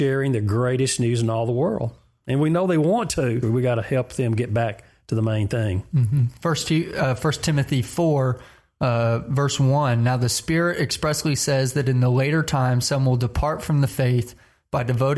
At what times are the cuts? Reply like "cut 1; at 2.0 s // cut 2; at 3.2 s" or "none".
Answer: cut 1; at 3.4 s